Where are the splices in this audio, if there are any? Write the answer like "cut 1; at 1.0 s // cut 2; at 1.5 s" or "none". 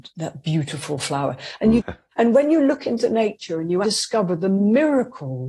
cut 1; at 1.8 s // cut 2; at 3.8 s